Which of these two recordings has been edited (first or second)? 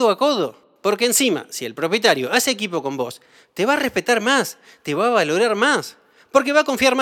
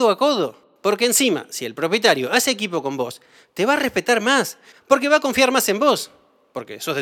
second